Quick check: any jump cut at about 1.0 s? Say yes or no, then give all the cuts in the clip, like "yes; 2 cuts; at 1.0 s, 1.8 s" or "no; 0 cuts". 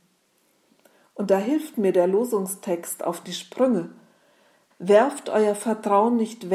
no; 1 cut; at 4.7 s